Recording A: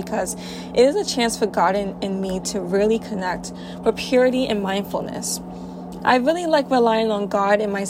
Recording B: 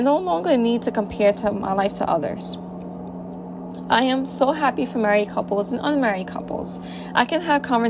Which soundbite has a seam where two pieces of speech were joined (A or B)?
A